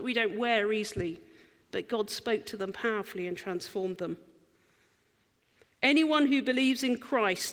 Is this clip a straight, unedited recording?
yes; 0 cuts

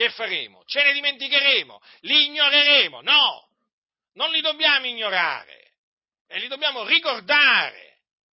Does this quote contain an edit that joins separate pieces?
no; 0 cuts

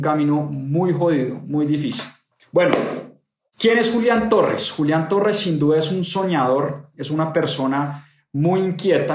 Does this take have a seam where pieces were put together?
no; 0 cuts

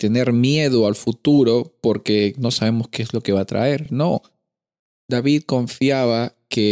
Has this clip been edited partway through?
no; 0 cuts

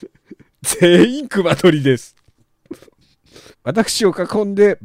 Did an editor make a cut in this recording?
yes; 1 cut; at 3.5 s

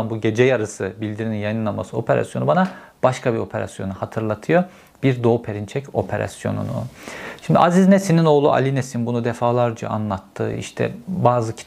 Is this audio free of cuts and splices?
yes; 0 cuts

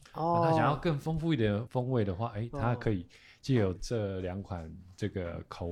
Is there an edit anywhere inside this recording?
yes; 2 cuts; at 1.7 s, 3.8 s

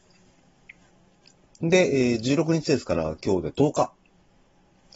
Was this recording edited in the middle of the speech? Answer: yes; 1 cut; at 1.5 s

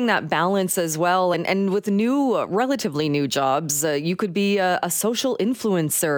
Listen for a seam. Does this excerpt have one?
no; 0 cuts

